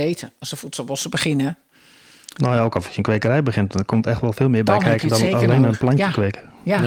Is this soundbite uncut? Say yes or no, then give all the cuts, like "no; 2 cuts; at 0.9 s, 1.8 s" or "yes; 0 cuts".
yes; 0 cuts